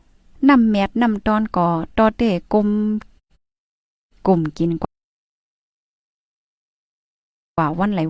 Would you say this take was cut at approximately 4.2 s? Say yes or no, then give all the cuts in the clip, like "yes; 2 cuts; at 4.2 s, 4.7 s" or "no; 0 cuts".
no; 0 cuts